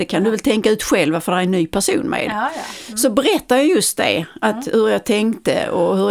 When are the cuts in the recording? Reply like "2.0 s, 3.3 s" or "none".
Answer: none